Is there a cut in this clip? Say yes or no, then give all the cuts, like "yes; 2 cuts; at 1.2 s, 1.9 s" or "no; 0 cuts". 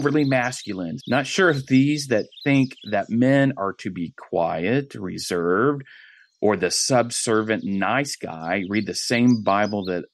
yes; 1 cut; at 1.0 s